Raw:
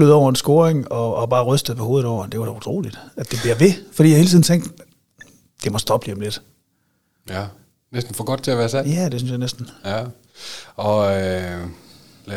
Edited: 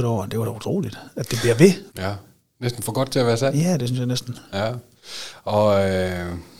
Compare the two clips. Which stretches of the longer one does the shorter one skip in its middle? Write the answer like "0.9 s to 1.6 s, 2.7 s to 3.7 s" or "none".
3.9 s to 7.2 s